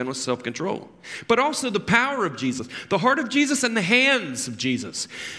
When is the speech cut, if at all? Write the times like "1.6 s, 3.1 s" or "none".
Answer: none